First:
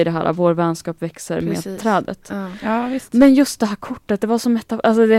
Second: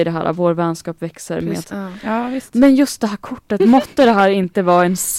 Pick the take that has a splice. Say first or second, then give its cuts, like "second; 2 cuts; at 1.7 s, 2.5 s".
second; 2 cuts; at 1.6 s, 3.6 s